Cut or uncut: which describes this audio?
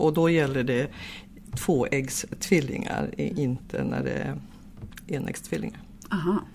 uncut